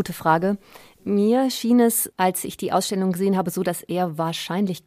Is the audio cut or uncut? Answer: uncut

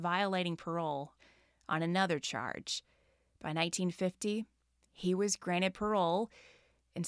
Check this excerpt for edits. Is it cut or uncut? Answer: uncut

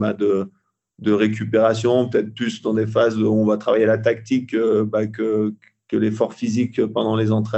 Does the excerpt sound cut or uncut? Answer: uncut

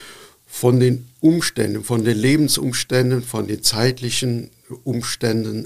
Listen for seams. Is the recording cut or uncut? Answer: uncut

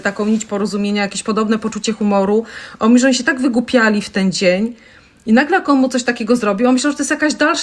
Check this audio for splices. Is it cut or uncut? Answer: uncut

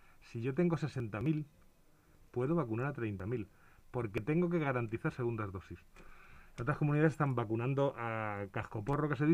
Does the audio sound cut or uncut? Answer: uncut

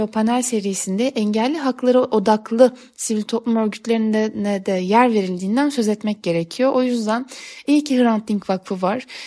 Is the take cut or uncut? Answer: uncut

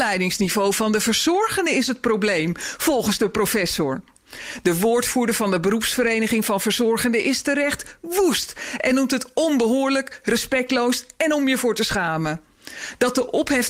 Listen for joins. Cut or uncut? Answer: uncut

